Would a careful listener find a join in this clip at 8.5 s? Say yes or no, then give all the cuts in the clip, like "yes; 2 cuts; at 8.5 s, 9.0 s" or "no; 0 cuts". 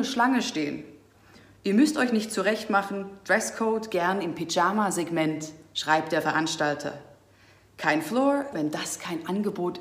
yes; 1 cut; at 8.5 s